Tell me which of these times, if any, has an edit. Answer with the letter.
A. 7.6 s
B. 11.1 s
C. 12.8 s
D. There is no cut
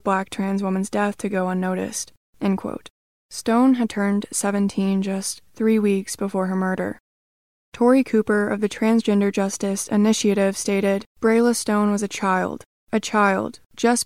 B